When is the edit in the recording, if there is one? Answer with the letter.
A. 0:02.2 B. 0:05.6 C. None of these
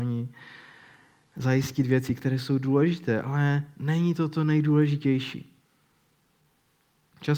C